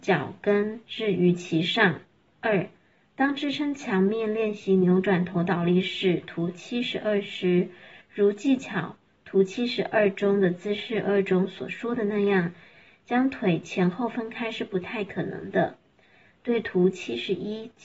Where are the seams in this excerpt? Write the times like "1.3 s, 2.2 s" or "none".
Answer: 16.4 s